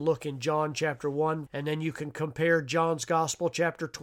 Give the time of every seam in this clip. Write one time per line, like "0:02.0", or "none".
0:01.5